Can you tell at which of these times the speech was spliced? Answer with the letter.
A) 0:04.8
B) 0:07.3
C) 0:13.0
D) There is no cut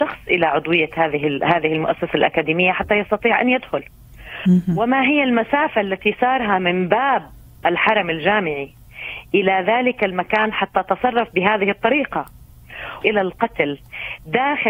C